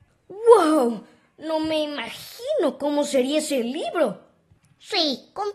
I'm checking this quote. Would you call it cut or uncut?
uncut